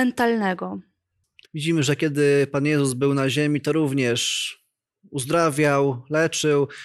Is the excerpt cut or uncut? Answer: cut